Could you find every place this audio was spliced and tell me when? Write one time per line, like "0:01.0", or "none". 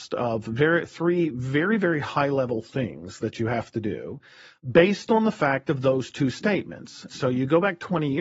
0:07.1

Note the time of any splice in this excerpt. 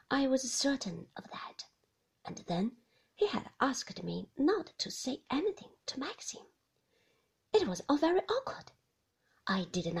none

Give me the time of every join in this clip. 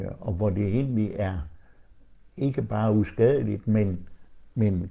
none

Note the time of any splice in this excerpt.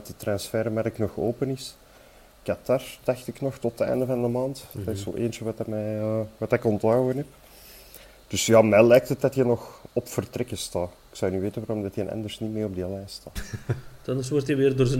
0:13.4

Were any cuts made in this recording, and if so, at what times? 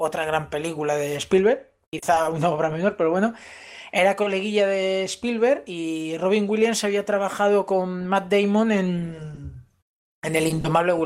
0:01.8

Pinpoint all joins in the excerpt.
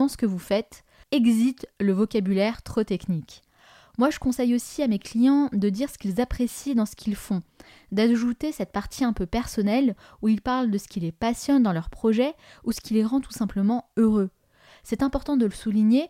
0:01.0
0:14.7

